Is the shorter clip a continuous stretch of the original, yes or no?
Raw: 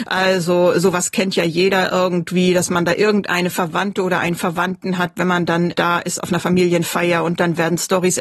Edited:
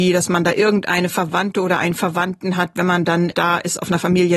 yes